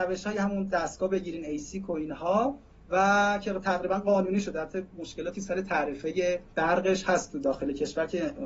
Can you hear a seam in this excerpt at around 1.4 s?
no; 1 cut; at 6.5 s

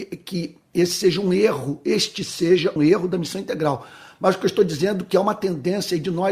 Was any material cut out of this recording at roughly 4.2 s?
no; 1 cut; at 2.8 s

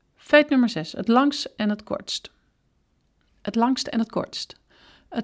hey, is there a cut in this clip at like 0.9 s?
no; 0 cuts

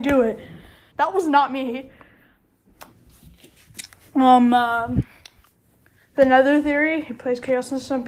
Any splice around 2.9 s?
yes; 2 cuts; at 0.9 s, 2.9 s

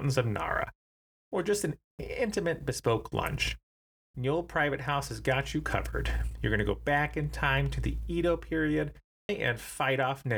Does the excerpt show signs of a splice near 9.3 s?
yes; 1 cut; at 9.3 s

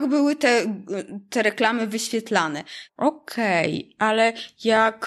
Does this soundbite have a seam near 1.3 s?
no; 1 cut; at 2.9 s

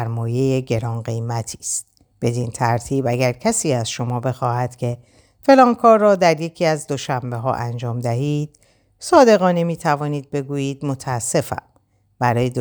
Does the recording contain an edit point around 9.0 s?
no; 1 cut; at 2.1 s

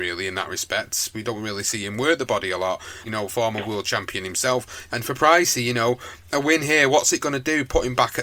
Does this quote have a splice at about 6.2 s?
no; 2 cuts; at 3.1 s, 4.9 s

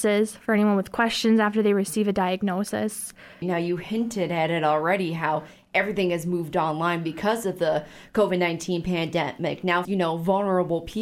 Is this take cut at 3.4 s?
yes; 2 cuts; at 3.4 s, 9.8 s

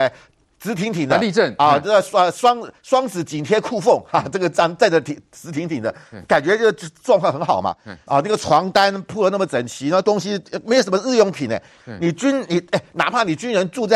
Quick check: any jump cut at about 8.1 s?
yes; 1 cut; at 8.1 s

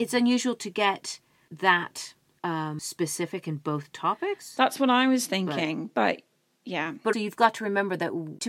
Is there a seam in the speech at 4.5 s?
no; 1 cut; at 7.1 s

